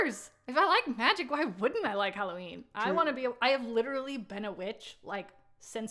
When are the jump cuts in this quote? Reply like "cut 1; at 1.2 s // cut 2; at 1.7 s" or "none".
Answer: none